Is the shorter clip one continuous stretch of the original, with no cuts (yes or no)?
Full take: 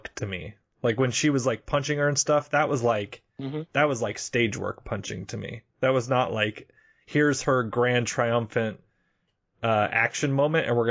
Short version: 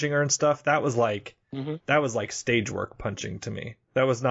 yes